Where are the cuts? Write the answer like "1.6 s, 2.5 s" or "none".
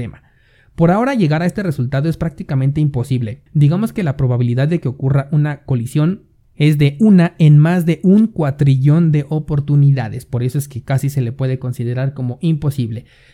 3.5 s